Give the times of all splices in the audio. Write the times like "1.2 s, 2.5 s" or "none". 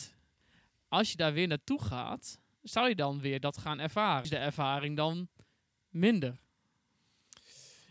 4.2 s